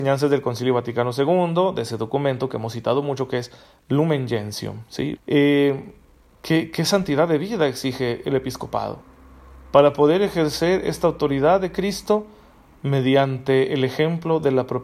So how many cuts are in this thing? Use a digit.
1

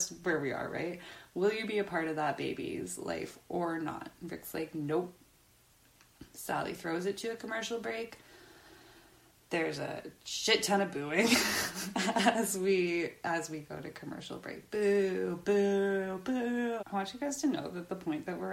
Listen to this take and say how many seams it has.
1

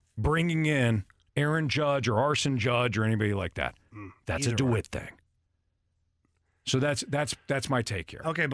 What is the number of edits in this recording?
0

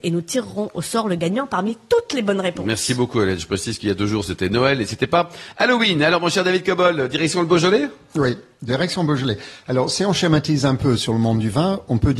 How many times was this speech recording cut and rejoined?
0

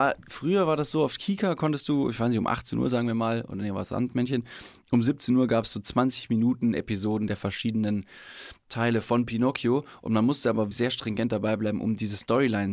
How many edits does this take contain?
1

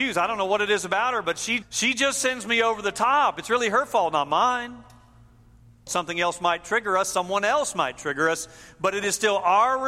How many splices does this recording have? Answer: 2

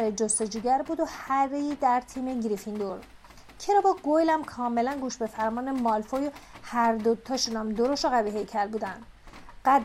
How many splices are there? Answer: 0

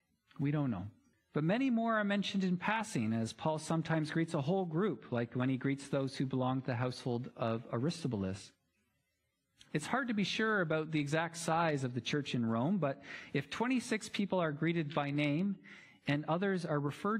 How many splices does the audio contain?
1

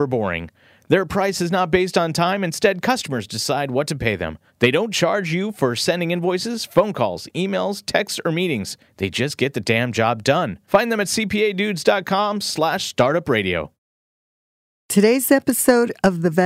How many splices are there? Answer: 0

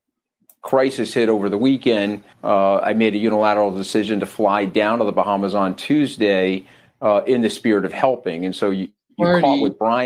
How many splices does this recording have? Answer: 1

